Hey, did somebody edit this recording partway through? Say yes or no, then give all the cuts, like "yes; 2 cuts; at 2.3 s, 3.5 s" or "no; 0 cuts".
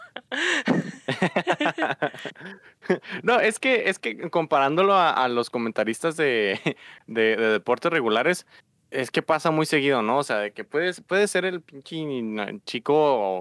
no; 0 cuts